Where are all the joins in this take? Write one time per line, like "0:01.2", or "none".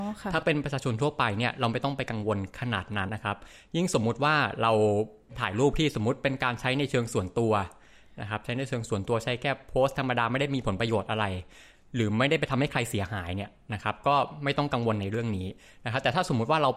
0:03.1